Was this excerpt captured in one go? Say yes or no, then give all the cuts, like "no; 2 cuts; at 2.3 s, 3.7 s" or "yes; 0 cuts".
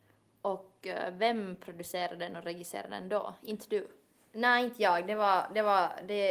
yes; 0 cuts